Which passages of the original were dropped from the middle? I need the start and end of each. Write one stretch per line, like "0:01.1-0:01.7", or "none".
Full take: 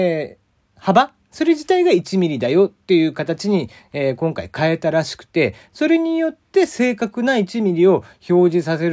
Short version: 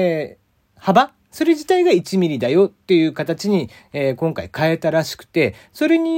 none